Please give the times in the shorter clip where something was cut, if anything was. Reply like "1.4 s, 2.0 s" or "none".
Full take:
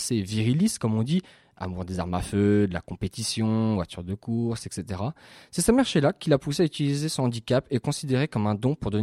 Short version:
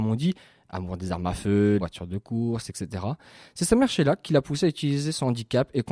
1.8 s